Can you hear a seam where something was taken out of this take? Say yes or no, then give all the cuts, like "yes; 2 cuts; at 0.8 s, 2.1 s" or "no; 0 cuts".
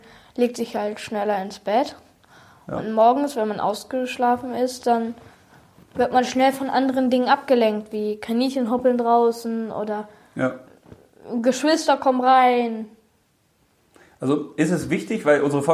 no; 0 cuts